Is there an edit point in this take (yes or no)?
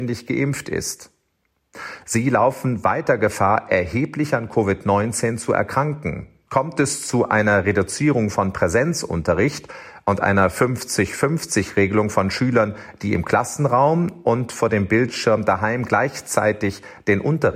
yes